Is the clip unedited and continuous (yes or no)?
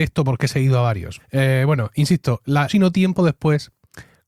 no